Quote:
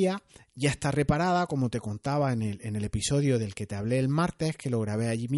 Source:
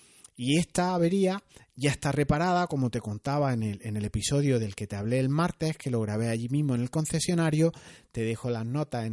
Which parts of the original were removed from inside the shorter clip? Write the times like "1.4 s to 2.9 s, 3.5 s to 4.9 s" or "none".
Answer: none